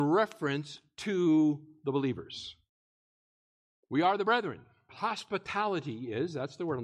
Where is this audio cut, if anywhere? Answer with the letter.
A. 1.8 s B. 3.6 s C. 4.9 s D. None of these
C